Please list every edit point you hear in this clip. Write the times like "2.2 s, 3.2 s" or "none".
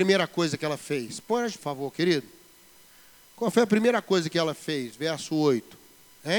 1.6 s